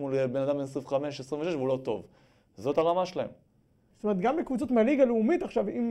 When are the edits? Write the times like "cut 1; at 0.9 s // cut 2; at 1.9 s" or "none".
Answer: cut 1; at 3.9 s